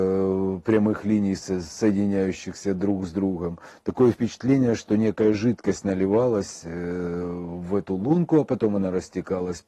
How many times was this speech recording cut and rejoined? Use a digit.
0